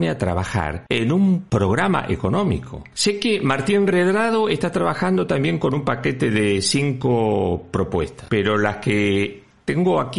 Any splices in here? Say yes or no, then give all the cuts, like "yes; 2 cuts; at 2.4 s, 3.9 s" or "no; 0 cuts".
no; 0 cuts